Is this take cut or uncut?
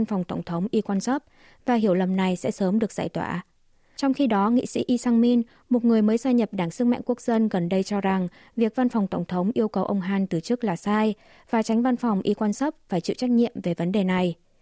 uncut